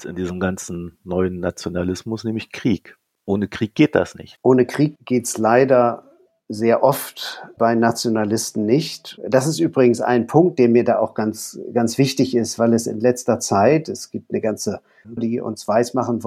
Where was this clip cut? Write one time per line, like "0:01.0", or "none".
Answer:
0:15.2